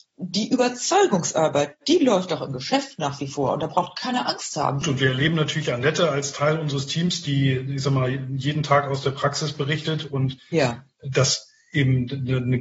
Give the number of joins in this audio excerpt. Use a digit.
2